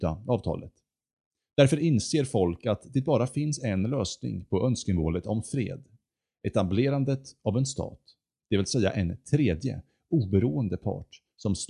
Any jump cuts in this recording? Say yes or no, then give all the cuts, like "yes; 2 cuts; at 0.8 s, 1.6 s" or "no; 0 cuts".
no; 0 cuts